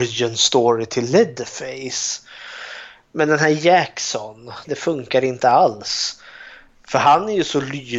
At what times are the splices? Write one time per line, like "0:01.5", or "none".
0:04.6
0:06.7